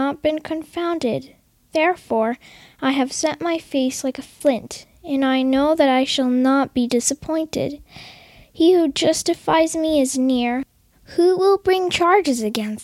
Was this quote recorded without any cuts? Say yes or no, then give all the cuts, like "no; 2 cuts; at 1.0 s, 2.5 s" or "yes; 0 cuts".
yes; 0 cuts